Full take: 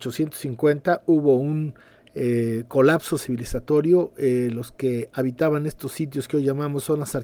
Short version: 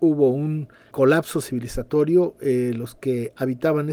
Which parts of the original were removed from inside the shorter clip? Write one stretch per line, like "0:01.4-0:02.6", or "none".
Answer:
0:02.0-0:02.7